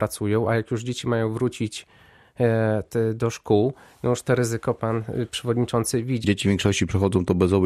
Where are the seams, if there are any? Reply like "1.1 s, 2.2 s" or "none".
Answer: 6.2 s